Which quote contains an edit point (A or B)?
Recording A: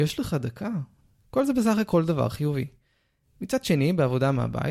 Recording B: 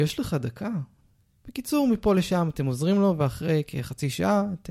A